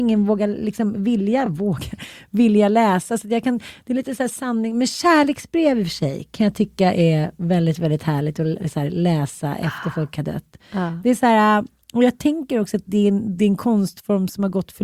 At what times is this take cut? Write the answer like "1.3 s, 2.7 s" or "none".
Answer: none